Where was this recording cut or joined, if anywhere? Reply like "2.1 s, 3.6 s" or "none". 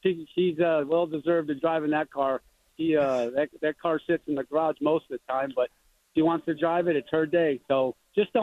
none